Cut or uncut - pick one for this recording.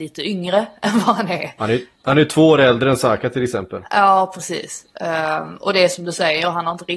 uncut